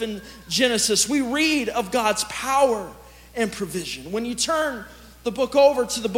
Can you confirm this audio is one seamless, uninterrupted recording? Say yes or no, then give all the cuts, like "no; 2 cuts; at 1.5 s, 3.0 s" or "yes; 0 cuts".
yes; 0 cuts